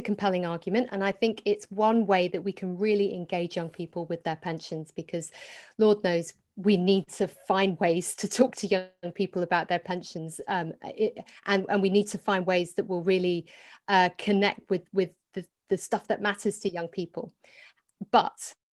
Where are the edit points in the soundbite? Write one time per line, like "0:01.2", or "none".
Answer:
none